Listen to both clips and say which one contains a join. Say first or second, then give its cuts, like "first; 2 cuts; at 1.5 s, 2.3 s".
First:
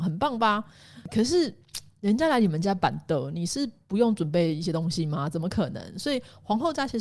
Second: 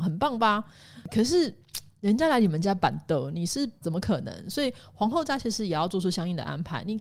second; 1 cut; at 3.8 s